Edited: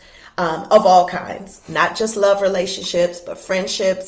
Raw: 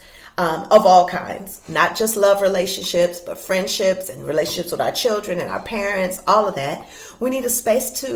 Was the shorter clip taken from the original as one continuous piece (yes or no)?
yes